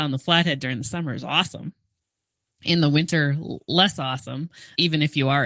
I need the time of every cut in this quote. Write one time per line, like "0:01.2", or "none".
none